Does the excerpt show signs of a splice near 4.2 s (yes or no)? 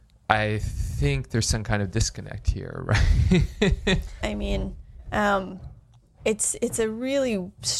yes